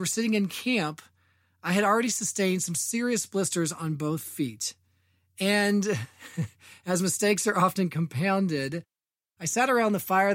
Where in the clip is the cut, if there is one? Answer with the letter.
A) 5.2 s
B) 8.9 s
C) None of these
C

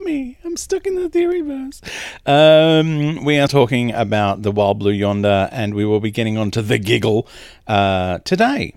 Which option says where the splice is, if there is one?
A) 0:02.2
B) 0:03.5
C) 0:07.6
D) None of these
B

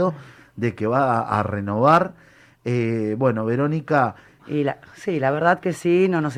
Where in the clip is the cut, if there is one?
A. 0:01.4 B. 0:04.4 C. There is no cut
B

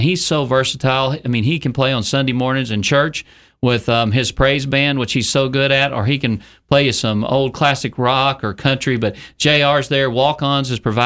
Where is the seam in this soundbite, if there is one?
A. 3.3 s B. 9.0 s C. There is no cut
C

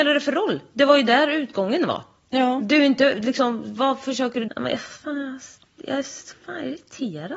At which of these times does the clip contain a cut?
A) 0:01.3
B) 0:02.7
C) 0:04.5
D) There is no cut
C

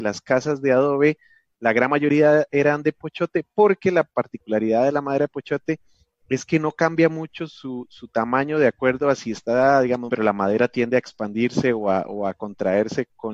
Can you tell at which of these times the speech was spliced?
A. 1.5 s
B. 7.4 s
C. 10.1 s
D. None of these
C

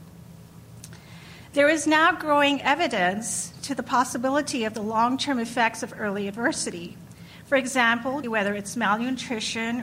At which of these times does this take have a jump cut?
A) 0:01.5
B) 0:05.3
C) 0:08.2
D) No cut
C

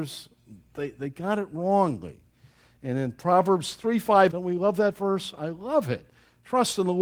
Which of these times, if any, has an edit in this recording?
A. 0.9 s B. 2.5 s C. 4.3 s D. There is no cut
C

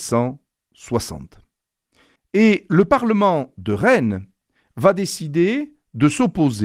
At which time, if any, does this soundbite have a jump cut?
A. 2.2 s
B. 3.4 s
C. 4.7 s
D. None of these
A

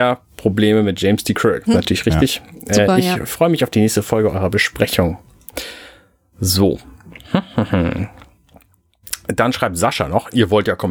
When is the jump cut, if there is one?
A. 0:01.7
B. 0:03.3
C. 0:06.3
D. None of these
A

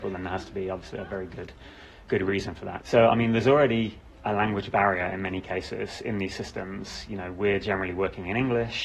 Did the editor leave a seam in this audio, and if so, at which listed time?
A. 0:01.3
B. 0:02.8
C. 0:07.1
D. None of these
B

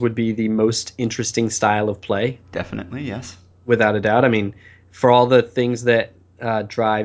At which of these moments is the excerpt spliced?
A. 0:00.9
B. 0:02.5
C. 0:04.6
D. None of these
D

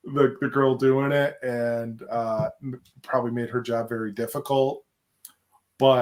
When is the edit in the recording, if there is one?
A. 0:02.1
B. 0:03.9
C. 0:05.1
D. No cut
D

